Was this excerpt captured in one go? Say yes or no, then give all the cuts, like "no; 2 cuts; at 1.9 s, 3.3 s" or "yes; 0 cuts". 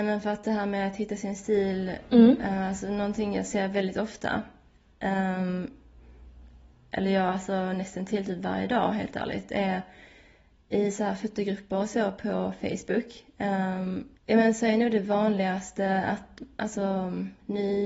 no; 1 cut; at 14.2 s